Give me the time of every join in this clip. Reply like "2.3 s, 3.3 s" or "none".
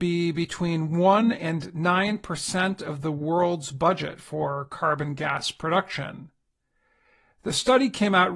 none